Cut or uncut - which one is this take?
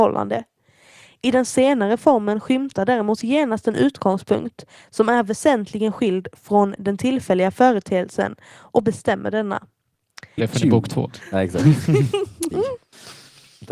cut